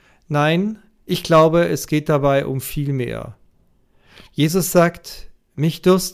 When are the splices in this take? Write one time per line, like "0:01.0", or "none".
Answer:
none